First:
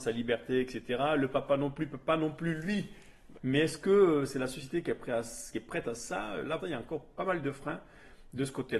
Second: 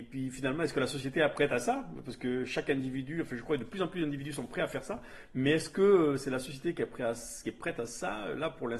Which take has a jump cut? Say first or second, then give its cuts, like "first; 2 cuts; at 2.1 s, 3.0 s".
first; 2 cuts; at 3.3 s, 6.6 s